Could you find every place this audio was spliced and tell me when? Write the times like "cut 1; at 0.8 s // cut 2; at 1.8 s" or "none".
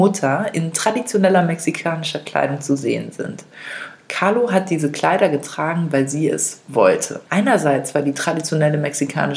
cut 1; at 7.3 s